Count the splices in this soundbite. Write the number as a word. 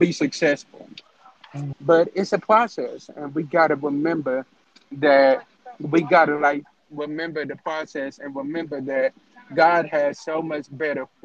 one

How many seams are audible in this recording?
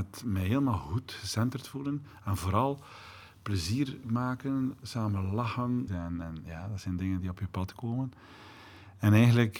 one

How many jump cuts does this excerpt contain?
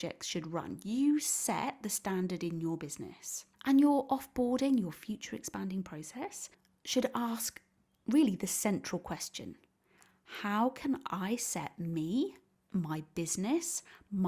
one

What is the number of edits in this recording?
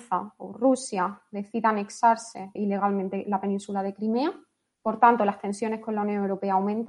one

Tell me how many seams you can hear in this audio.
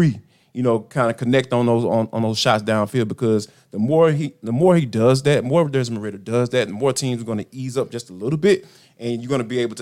zero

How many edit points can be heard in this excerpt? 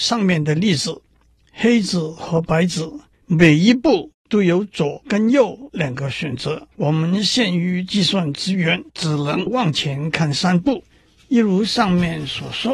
one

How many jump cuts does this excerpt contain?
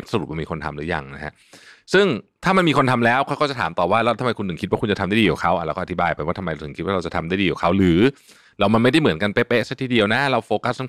zero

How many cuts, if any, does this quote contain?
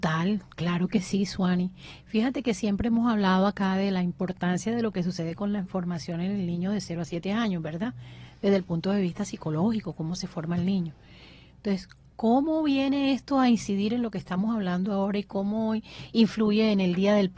zero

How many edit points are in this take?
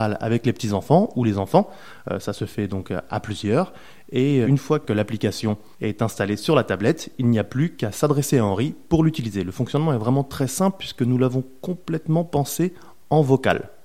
one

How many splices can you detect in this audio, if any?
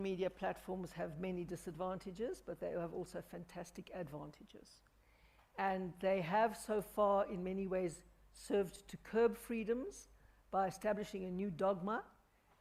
zero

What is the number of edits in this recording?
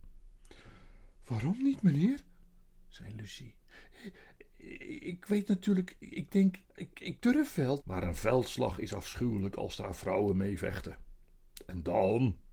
two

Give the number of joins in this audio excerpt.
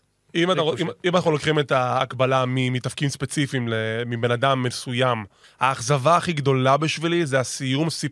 one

